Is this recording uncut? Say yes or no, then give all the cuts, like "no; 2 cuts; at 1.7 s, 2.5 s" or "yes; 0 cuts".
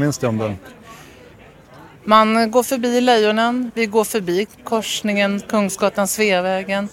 no; 1 cut; at 3.7 s